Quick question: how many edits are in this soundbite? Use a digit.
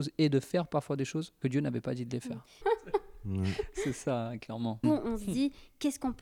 3